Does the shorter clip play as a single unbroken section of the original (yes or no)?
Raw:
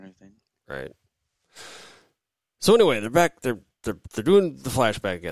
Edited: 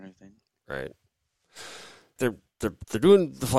no